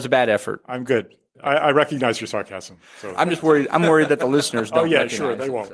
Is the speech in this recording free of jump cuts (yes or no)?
no